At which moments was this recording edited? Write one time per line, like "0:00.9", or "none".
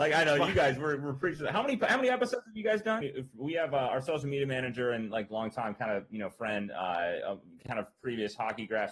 0:03.0